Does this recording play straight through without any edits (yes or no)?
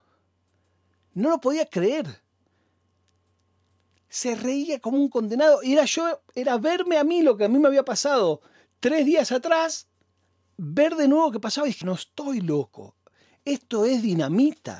no